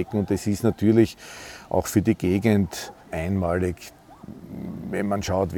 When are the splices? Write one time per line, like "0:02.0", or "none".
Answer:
0:03.0

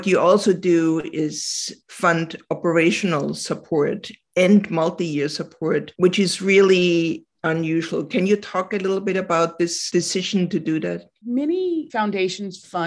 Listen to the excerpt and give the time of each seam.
none

